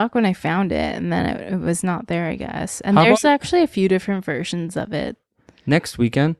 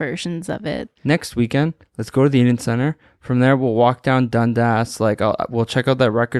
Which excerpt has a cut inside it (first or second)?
second